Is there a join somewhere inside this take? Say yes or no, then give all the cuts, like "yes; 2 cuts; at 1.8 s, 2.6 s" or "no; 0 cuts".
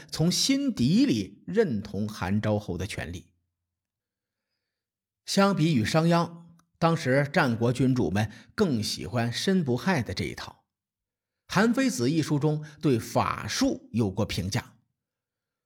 no; 0 cuts